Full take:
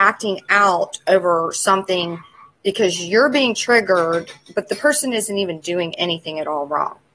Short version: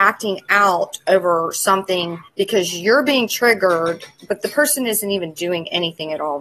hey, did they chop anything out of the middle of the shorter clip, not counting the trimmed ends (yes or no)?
yes